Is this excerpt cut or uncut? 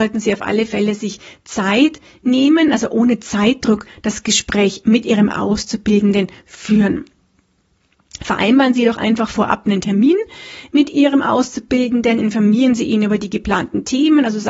uncut